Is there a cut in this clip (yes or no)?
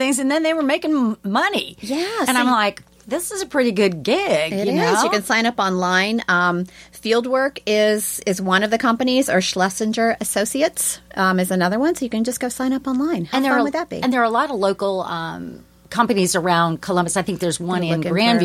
no